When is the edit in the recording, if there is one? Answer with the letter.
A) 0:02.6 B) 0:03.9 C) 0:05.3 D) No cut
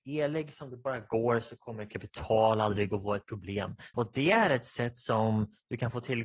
B